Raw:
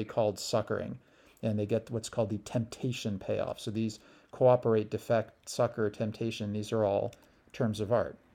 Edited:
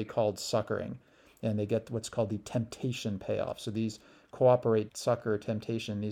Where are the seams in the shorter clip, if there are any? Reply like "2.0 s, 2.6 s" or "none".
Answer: 4.9 s